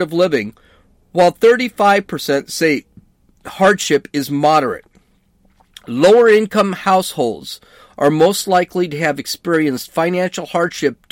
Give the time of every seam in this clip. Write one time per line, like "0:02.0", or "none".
none